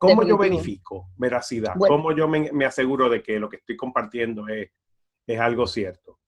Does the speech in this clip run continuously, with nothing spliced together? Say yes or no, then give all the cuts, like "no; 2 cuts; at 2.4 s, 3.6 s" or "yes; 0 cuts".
yes; 0 cuts